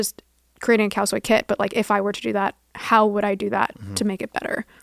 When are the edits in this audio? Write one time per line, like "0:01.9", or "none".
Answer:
none